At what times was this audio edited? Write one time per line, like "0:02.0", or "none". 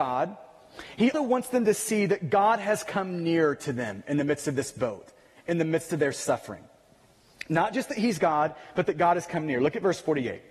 0:01.1

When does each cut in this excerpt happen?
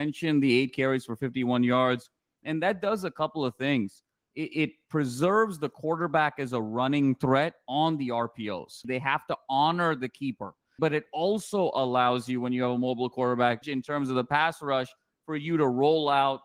0:08.8
0:10.8
0:13.6

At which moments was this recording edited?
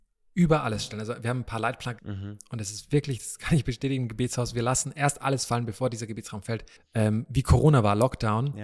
0:02.0
0:06.8

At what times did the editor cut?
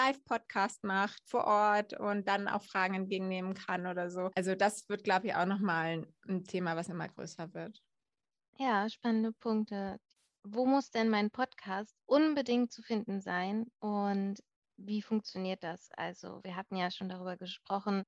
none

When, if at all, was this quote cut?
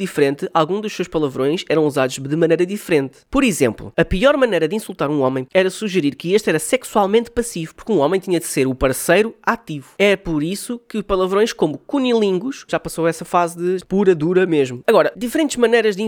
0:12.7
0:13.8

